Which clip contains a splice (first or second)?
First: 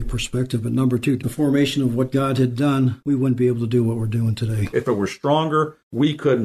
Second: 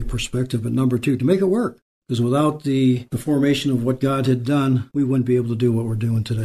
first